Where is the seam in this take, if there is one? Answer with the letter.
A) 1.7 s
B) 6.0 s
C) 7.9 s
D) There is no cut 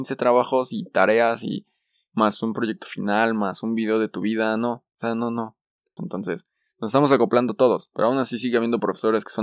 B